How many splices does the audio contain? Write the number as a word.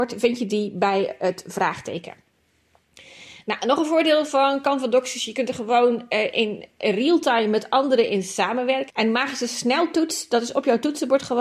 one